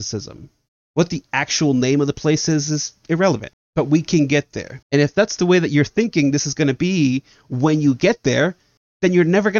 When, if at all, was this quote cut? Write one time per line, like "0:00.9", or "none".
0:03.5
0:04.8